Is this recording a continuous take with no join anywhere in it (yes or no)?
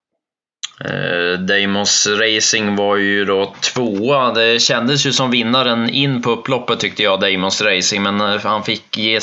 yes